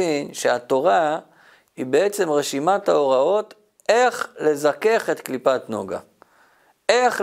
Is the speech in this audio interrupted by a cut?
no; 0 cuts

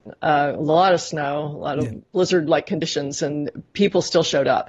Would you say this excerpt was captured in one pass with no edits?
no; 1 cut; at 2.1 s

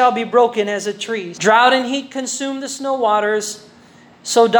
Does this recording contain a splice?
yes; 1 cut; at 1.3 s

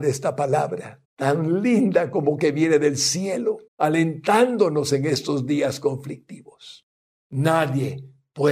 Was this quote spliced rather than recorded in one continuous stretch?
yes; 3 cuts; at 1.0 s, 3.7 s, 7.2 s

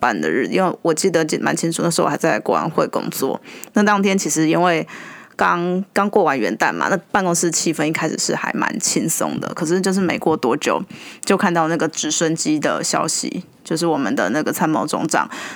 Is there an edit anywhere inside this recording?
no; 0 cuts

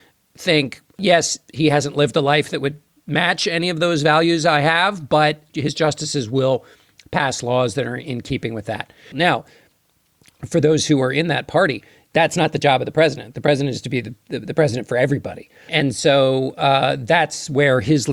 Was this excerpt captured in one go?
no; 1 cut; at 9.1 s

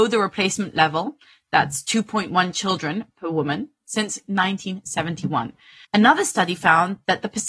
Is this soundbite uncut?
no; 1 cut; at 5.8 s

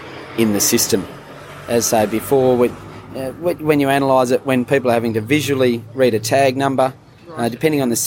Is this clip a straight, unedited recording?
yes; 0 cuts

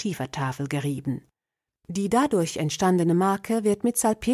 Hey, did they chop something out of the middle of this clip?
no; 0 cuts

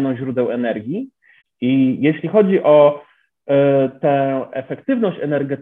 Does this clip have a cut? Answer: yes; 1 cut; at 1.4 s

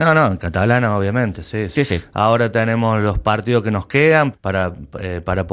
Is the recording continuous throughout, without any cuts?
no; 2 cuts; at 1.7 s, 4.3 s

